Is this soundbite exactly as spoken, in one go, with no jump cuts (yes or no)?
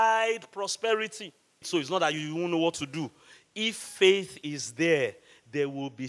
no